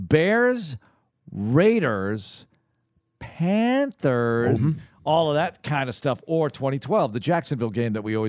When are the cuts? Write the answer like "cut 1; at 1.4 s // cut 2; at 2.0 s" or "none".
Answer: cut 1; at 4.6 s